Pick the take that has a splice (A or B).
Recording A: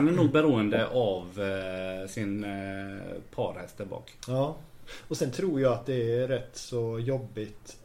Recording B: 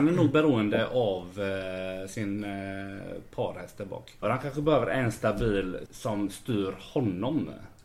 B